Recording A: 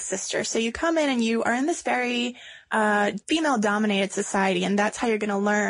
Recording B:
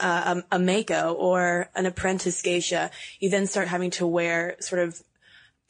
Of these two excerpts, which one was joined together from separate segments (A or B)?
A